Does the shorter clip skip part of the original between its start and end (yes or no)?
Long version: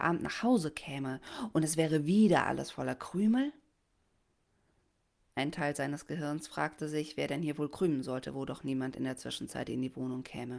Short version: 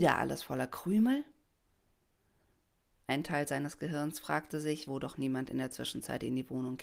yes